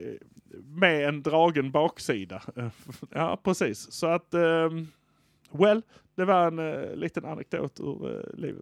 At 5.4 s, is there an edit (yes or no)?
no